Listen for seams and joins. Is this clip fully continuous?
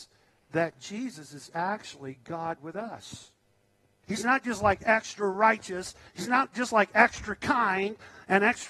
no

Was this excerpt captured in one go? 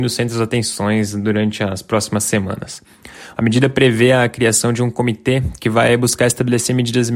no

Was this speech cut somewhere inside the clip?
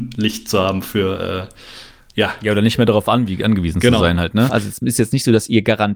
yes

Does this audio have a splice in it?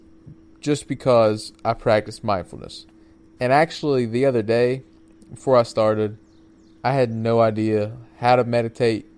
no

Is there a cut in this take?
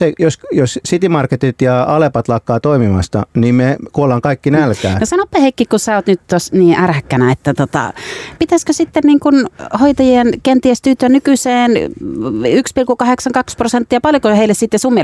yes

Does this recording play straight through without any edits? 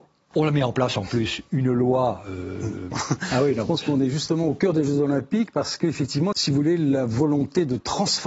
no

